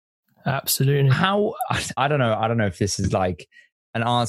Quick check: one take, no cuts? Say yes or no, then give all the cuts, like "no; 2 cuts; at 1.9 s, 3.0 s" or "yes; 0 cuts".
no; 1 cut; at 2.0 s